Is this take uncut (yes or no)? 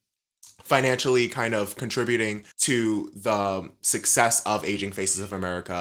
no